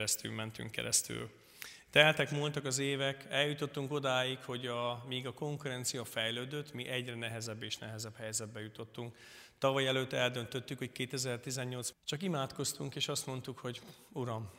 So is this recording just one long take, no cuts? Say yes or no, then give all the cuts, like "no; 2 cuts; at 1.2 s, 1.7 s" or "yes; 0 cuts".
no; 1 cut; at 11.9 s